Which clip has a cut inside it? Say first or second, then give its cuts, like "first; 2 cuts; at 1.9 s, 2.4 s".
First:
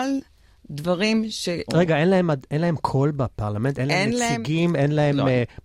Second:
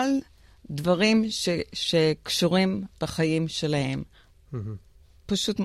first; 1 cut; at 1.7 s